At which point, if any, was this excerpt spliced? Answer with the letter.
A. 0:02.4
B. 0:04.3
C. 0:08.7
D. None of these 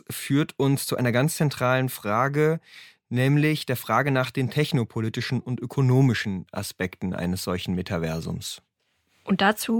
D